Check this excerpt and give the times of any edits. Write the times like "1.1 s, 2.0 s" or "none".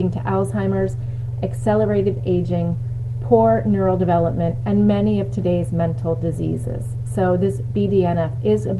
none